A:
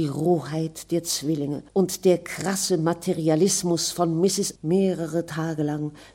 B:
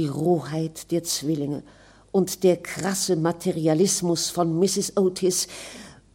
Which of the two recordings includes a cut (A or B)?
A